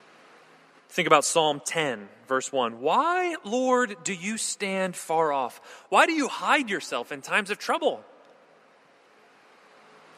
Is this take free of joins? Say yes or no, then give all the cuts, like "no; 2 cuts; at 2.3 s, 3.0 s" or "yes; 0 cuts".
yes; 0 cuts